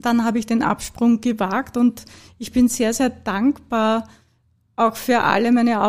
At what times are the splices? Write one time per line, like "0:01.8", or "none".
none